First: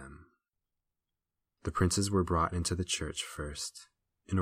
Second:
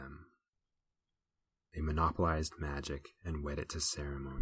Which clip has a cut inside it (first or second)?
second